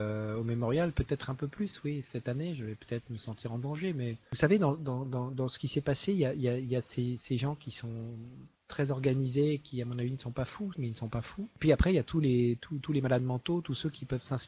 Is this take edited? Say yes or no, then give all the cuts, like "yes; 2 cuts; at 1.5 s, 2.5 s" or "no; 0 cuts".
yes; 2 cuts; at 8.5 s, 10.7 s